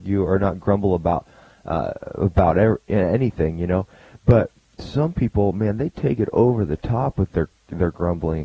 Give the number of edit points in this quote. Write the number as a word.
zero